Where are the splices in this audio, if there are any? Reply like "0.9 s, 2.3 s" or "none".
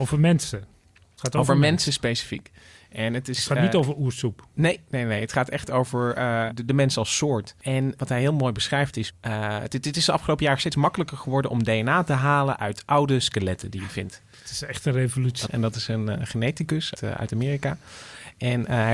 15.5 s, 17.0 s